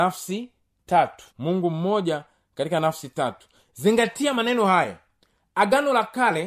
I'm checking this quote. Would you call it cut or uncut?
cut